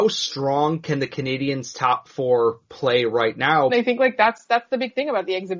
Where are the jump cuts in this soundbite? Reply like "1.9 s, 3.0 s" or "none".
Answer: 3.7 s

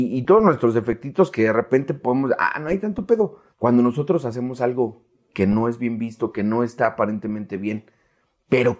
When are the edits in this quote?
3.5 s

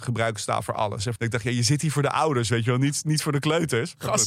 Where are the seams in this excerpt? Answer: 1.2 s

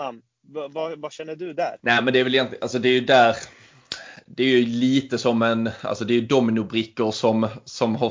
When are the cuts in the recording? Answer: 1.8 s

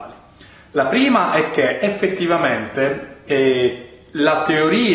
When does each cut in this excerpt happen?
none

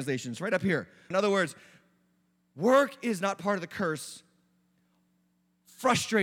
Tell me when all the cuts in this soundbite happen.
1.1 s

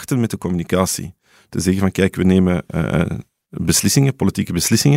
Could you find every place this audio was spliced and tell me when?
none

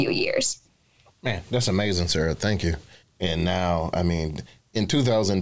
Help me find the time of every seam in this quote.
3.0 s

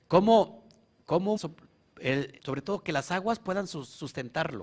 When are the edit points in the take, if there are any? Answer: 1.4 s, 2.4 s

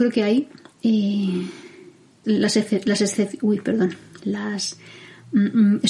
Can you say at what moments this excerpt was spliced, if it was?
2.2 s

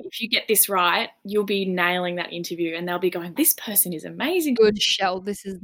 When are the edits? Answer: 3.4 s, 4.6 s

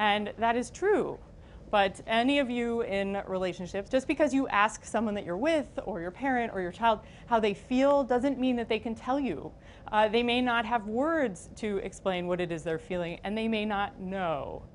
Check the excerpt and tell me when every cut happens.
3.9 s

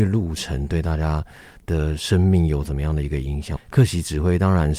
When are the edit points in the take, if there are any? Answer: 3.6 s

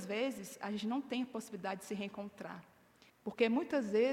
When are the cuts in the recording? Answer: 3.1 s

